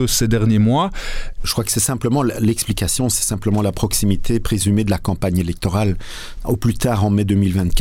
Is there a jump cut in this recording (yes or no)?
yes